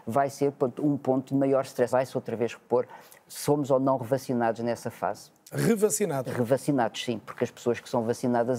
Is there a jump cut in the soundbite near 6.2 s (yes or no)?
no